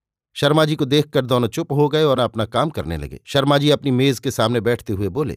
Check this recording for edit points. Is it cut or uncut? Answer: cut